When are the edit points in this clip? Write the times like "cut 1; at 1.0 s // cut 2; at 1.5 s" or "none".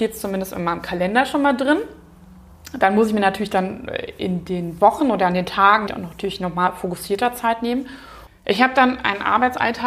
cut 1; at 5.9 s // cut 2; at 8.3 s